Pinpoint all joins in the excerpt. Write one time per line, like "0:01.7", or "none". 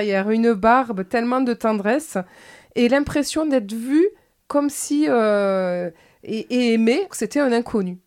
0:07.1